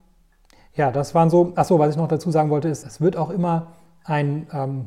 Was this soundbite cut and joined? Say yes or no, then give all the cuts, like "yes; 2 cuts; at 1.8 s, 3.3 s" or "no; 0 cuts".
yes; 1 cut; at 2.8 s